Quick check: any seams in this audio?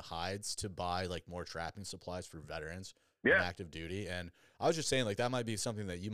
no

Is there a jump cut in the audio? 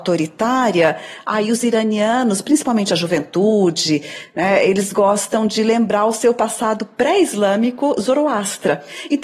no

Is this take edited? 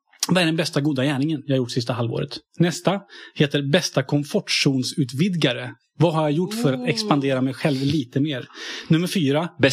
no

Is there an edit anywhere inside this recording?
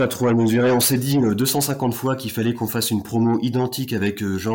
no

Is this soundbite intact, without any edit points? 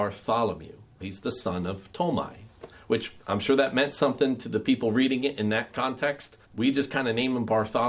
no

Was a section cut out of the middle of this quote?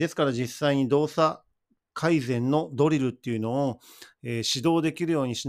no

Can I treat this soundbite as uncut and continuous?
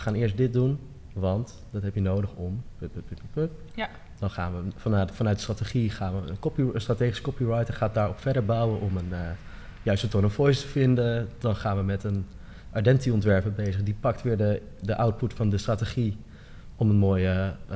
yes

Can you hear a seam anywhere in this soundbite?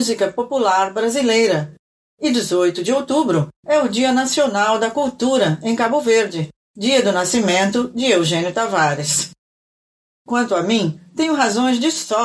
yes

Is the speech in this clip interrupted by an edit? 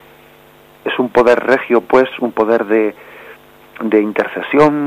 no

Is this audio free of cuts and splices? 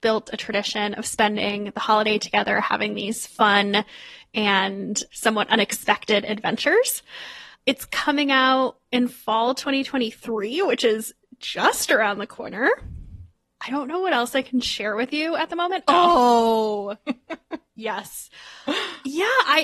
no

